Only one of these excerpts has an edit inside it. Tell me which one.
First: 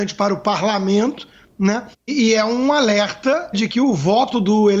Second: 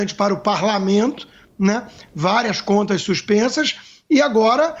first; 2 cuts; at 1.9 s, 3.5 s

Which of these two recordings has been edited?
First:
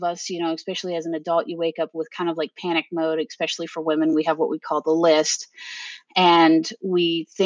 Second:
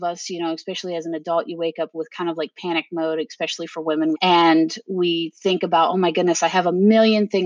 second; 1 cut; at 4.1 s

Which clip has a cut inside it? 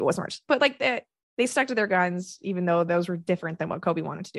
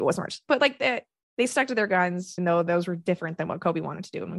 second; 1 cut; at 2.4 s

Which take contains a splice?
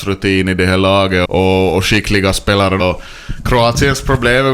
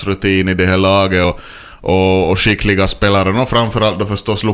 first; 2 cuts; at 1.2 s, 2.8 s

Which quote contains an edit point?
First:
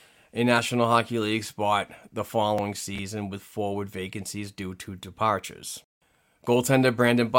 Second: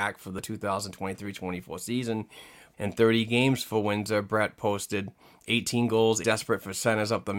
second; 2 cuts; at 2.7 s, 6.2 s

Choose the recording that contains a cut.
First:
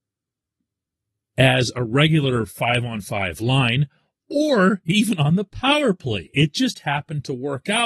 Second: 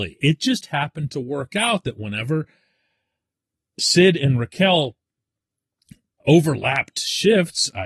second; 1 cut; at 6.2 s

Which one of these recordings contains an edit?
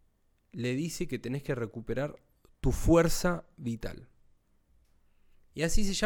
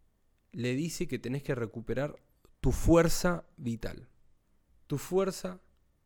second; 1 cut; at 4.8 s

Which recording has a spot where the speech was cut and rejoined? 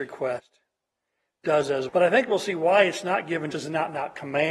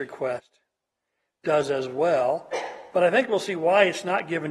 first; 2 cuts; at 1.9 s, 3.5 s

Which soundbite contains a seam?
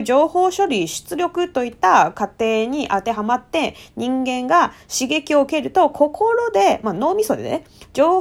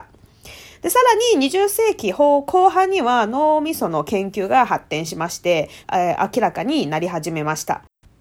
second; 1 cut; at 5.8 s

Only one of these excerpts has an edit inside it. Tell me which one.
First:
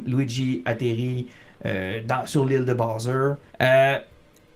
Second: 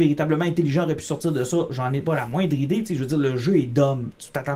first; 1 cut; at 3.5 s

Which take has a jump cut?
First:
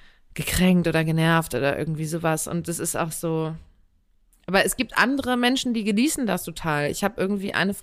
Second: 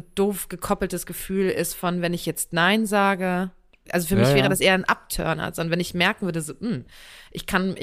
second; 1 cut; at 3.9 s

